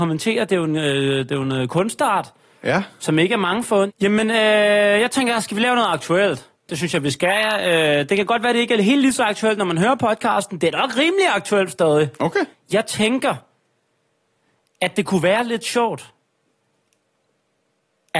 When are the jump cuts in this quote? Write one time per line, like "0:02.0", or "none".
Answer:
0:03.9
0:12.5